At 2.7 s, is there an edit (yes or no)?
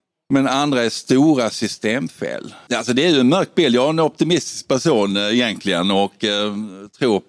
yes